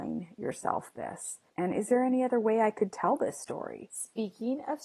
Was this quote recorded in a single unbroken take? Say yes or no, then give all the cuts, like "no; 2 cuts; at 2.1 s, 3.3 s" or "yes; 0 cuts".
no; 2 cuts; at 1.5 s, 3.9 s